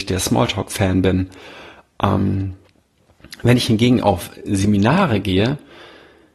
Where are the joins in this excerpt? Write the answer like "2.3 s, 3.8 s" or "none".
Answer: none